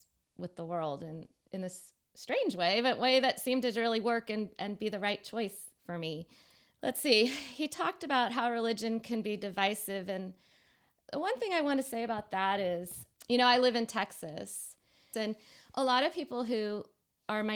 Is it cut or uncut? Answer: cut